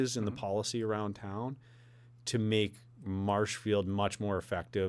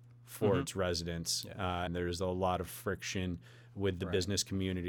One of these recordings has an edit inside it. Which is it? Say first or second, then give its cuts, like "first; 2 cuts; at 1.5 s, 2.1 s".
second; 1 cut; at 1.9 s